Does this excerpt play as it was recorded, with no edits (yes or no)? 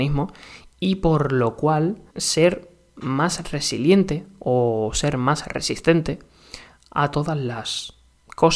no